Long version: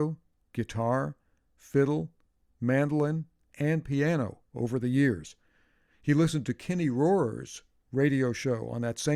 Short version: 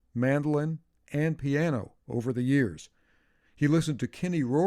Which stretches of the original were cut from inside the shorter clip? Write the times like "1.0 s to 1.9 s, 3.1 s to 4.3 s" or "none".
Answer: none